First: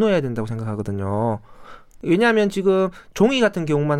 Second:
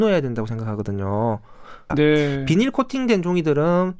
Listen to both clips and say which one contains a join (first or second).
second